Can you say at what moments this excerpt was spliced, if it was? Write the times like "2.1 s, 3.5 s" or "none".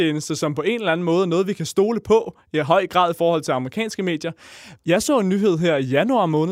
4.8 s